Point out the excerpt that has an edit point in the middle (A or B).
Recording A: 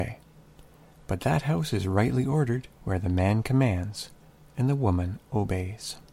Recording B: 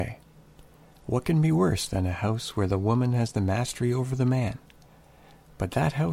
A